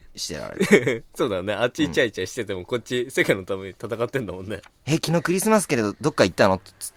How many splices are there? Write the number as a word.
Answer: zero